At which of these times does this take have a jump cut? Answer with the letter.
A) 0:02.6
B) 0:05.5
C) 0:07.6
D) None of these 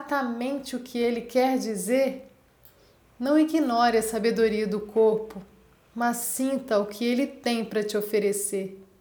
D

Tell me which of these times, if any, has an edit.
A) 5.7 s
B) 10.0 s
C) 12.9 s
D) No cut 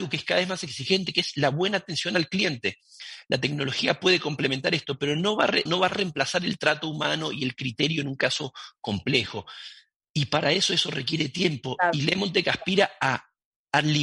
A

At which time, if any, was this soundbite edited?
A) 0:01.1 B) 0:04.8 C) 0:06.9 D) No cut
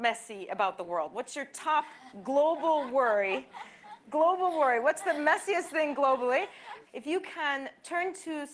C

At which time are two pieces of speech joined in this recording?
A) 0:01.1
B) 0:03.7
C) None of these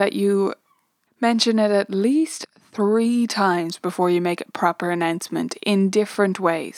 A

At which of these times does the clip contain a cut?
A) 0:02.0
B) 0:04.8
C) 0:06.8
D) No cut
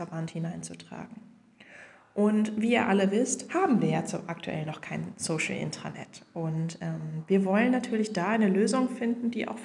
D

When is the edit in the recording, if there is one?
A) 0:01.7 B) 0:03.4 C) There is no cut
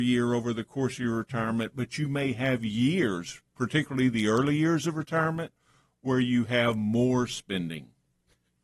C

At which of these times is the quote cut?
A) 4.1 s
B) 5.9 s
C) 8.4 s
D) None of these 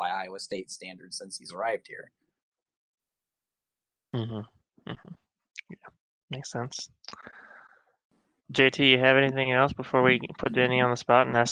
C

